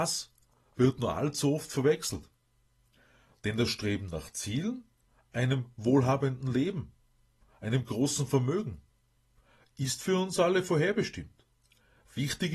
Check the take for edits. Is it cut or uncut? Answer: uncut